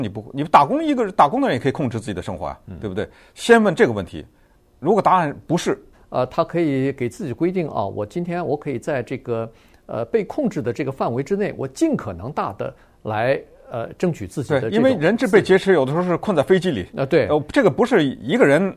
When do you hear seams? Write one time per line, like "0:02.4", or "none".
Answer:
0:05.9